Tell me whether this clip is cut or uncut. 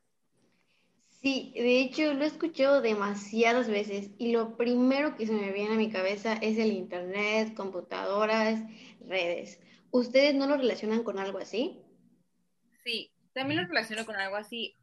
uncut